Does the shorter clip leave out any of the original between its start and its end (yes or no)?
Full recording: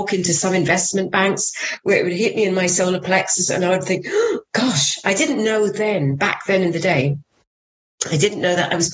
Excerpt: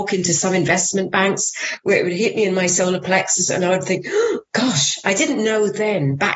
no